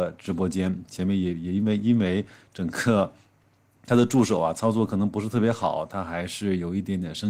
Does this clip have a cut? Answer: no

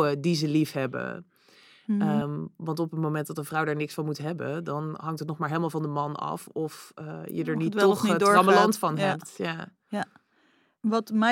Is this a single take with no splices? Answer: yes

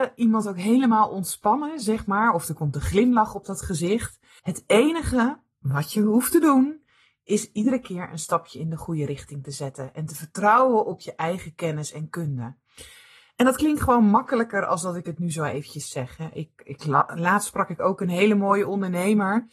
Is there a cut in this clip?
yes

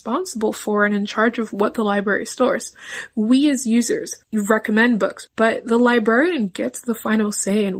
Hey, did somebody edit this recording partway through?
yes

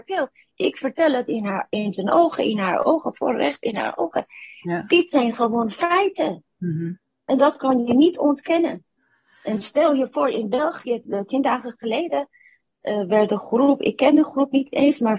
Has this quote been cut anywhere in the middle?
yes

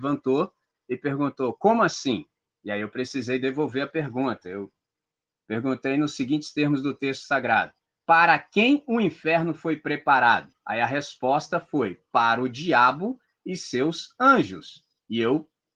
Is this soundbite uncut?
yes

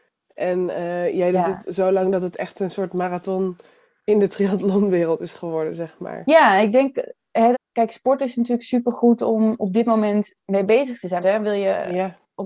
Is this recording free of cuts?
no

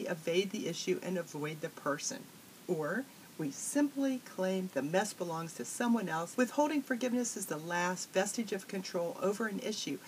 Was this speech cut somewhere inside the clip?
yes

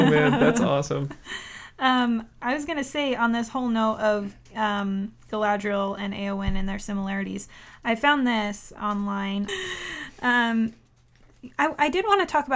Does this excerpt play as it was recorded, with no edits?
no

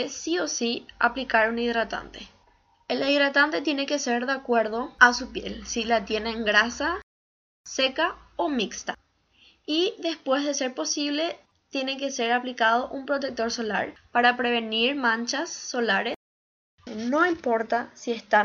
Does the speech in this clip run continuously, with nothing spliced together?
no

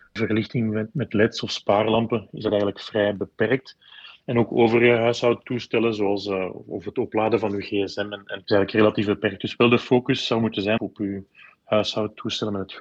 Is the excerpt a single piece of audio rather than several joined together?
no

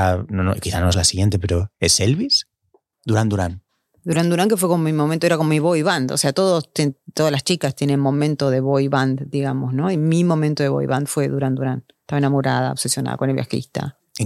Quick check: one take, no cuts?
no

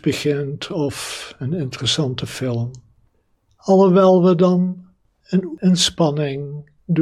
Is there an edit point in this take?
yes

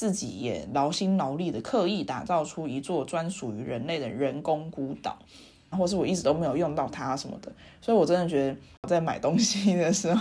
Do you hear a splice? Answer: yes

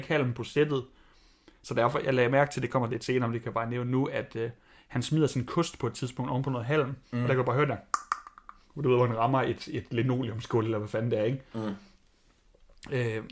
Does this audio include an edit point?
no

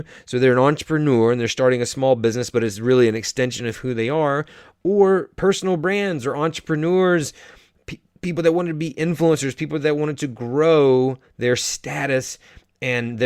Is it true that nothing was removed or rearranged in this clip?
yes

